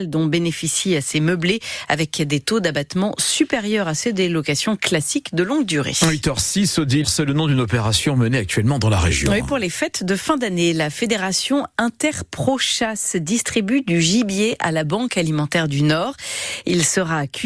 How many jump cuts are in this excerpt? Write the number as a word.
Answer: one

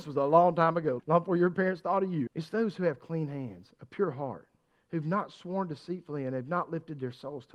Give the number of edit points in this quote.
two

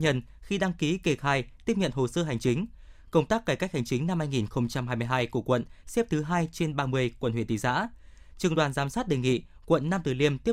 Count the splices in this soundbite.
zero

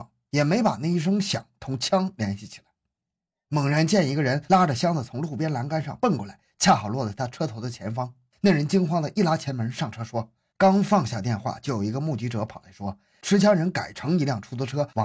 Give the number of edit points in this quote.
one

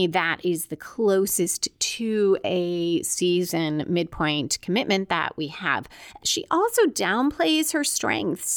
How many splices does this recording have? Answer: one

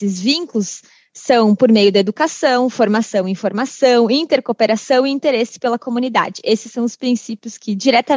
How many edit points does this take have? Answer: zero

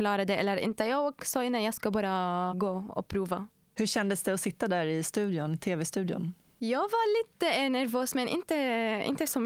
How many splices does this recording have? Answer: zero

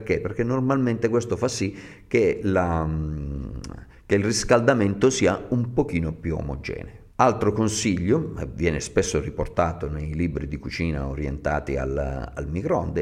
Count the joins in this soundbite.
one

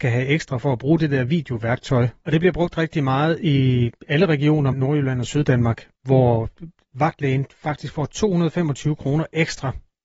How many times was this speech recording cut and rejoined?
two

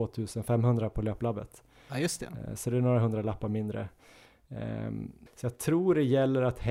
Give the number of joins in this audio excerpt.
one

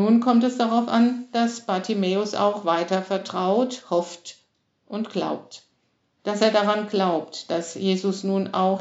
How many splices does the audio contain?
zero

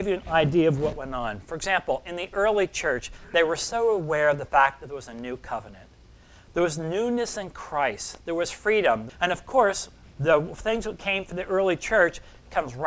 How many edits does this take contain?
one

